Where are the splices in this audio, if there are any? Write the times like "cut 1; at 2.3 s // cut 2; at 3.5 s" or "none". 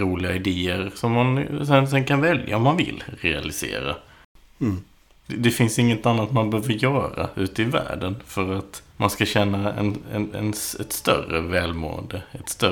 cut 1; at 5.2 s // cut 2; at 8.9 s